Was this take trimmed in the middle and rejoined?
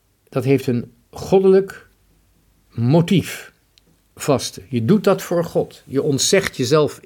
no; 0 cuts

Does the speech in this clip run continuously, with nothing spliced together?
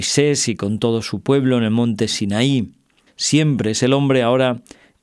no; 1 cut; at 3.1 s

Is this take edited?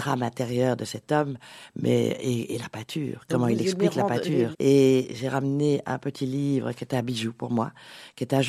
yes; 1 cut; at 4.5 s

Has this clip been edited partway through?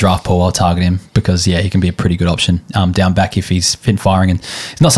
no; 0 cuts

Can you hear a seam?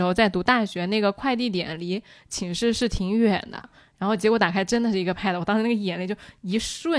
yes; 1 cut; at 3.6 s

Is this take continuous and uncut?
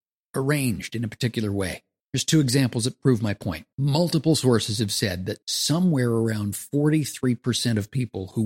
no; 3 cuts; at 2.0 s, 3.7 s, 5.4 s

